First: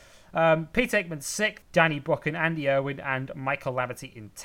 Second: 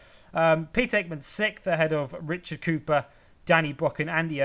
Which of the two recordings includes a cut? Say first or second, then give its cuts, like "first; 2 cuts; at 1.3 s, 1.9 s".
first; 1 cut; at 1.6 s